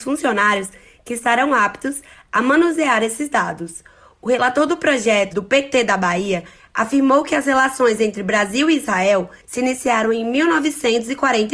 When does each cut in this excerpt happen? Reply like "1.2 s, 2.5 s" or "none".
5.3 s